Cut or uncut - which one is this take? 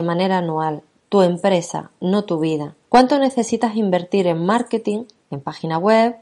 cut